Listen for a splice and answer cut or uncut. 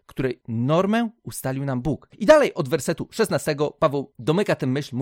cut